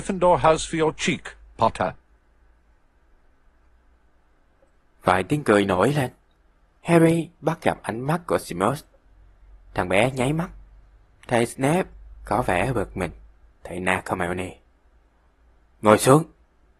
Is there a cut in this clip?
no; 0 cuts

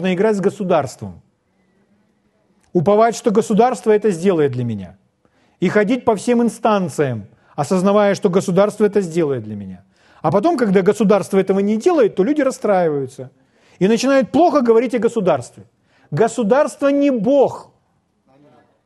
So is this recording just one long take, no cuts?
yes; 0 cuts

